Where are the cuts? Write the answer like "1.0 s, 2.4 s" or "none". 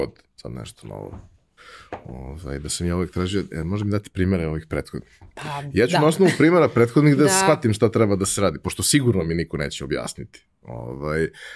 none